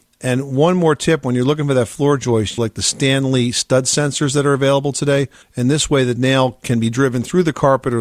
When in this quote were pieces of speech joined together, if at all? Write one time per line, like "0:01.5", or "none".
0:02.6
0:05.4